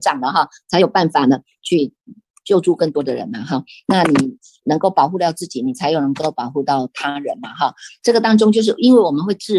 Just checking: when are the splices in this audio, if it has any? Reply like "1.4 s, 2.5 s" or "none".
8.0 s